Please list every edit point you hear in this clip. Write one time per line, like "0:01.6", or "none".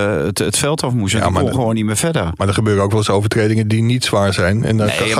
none